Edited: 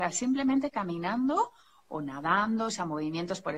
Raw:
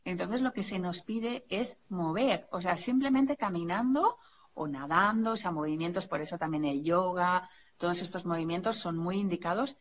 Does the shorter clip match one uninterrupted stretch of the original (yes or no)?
yes